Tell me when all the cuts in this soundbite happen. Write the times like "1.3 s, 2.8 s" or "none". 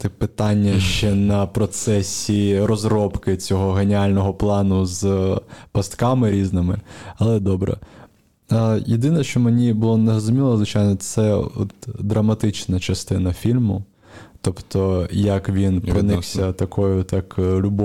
none